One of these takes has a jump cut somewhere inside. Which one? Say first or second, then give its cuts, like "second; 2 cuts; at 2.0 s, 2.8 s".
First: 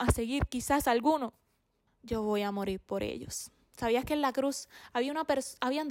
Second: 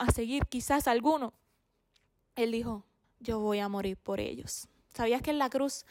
first; 1 cut; at 1.8 s